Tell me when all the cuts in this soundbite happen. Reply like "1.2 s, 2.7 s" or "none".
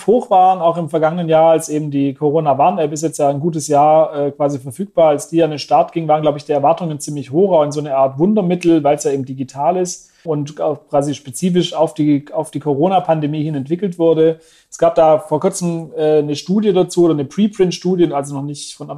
10.3 s

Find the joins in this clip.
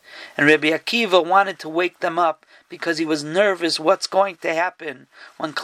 none

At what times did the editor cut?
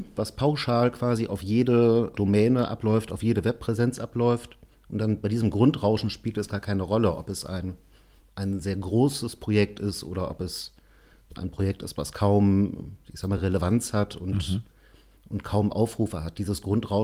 none

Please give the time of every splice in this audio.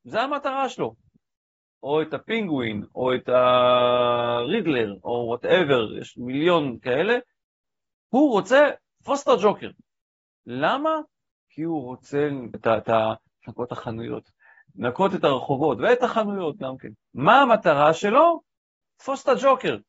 12.5 s, 16.9 s

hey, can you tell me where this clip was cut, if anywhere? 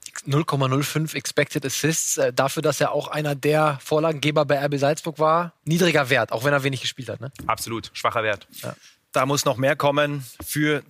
5.6 s

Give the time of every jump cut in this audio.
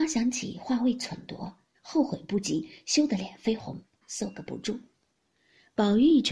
1.7 s, 4.0 s

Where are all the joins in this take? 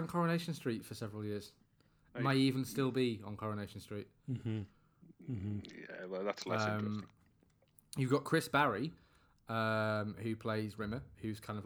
none

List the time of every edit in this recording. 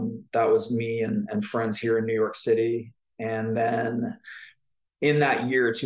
none

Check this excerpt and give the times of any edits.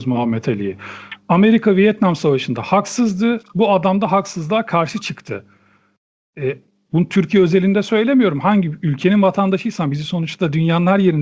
6.9 s

